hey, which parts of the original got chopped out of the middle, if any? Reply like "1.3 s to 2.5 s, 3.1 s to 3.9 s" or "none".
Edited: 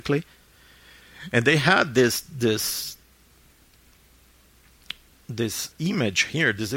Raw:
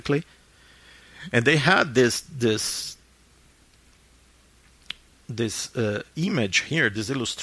5.7 s to 6.1 s